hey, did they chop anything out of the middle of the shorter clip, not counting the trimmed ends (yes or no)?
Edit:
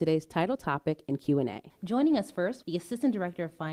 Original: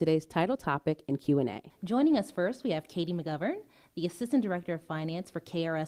yes